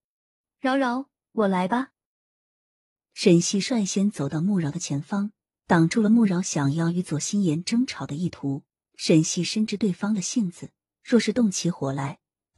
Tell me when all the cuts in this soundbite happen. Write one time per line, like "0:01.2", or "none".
0:08.8